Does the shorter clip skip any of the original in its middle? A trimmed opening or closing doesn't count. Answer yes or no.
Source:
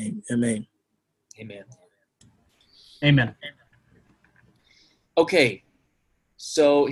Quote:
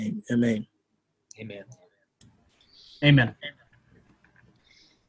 no